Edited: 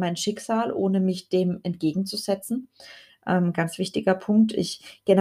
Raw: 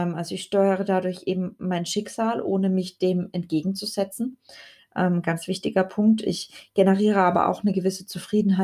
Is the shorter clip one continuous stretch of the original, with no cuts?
yes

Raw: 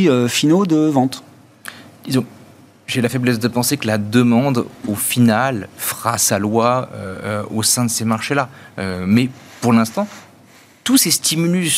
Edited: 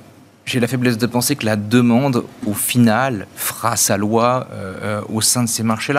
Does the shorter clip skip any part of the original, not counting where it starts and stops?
no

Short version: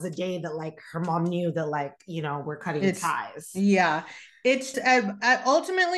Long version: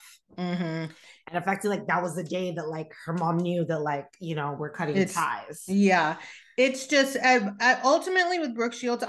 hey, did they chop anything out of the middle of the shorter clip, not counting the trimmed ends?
yes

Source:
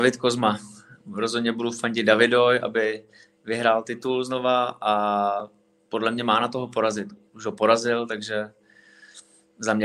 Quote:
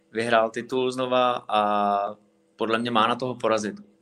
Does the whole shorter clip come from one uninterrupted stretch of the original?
yes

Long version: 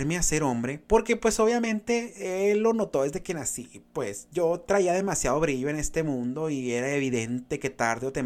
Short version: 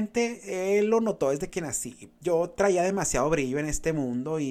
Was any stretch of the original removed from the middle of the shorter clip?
yes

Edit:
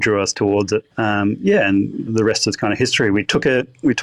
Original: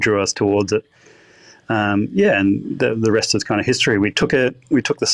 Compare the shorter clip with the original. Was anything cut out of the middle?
yes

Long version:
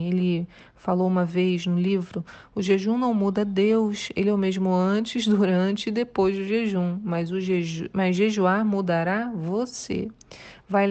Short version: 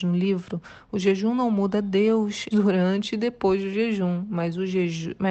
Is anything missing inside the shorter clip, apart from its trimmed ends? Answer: yes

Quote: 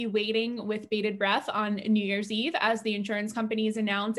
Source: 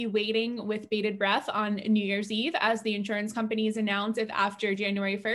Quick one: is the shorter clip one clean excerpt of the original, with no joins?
yes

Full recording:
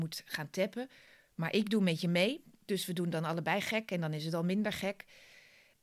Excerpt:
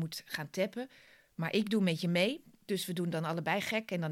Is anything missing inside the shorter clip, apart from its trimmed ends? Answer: no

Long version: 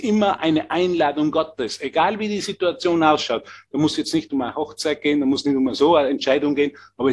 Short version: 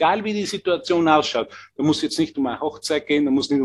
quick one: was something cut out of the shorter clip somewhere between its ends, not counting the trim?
no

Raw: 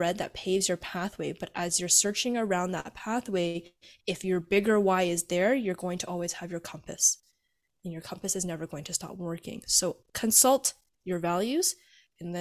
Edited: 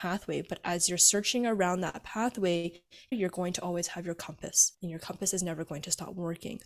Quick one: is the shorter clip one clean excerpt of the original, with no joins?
no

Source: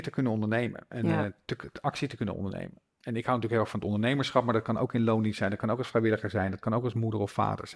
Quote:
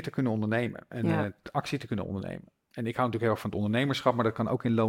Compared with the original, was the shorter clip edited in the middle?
yes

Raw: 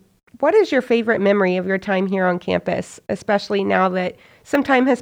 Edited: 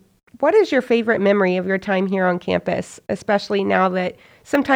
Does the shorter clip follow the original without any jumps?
yes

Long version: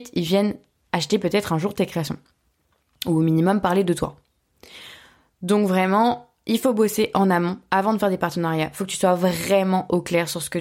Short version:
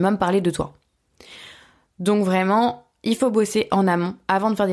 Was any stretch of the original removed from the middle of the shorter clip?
no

